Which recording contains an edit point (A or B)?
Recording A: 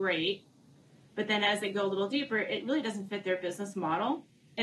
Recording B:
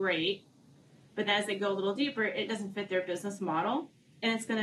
B